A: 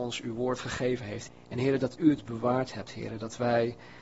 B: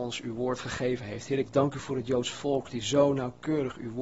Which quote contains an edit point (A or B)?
A